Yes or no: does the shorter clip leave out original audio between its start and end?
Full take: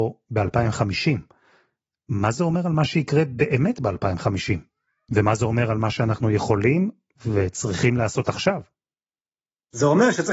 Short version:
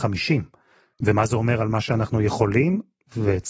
yes